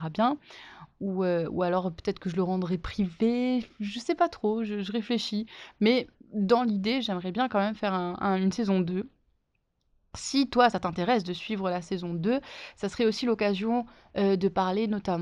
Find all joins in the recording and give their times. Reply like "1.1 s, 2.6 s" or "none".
none